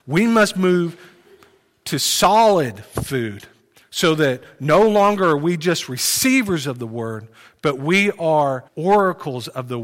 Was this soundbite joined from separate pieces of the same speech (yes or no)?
yes